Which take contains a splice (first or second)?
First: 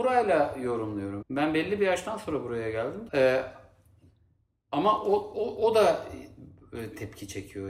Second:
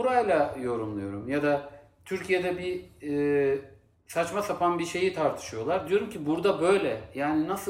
first